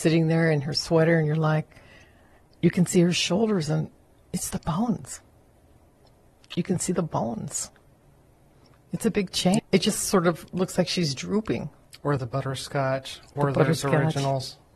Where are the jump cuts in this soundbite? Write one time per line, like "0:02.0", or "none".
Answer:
0:09.6
0:11.9